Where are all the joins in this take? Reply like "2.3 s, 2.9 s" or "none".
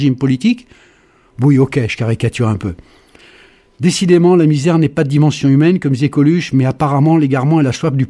none